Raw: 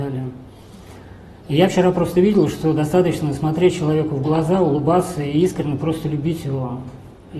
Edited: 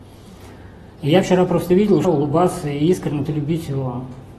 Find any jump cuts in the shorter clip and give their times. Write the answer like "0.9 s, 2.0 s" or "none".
2.0 s, 3.3 s